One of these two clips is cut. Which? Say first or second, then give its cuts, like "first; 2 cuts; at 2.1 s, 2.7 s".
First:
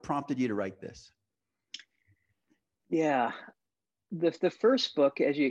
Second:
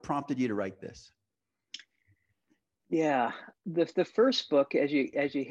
second; 1 cut; at 3.6 s